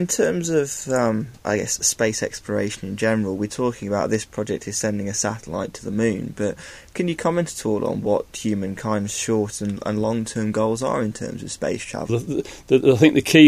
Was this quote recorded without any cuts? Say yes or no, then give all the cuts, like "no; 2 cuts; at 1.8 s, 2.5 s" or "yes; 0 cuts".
no; 2 cuts; at 1.4 s, 12.1 s